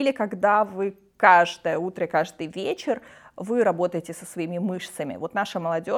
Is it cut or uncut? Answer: uncut